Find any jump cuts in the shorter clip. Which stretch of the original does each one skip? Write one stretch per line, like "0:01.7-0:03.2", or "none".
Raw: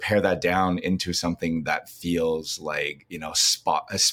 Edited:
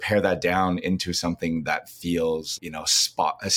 0:02.6-0:03.1